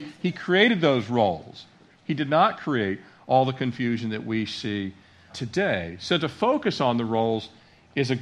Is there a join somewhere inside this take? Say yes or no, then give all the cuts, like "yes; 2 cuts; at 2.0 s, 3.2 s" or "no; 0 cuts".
yes; 1 cut; at 5.3 s